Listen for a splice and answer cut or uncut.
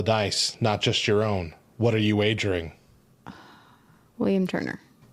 uncut